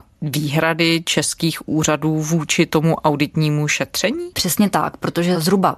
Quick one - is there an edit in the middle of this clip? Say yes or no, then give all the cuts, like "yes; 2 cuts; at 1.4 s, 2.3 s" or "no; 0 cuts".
yes; 1 cut; at 4.3 s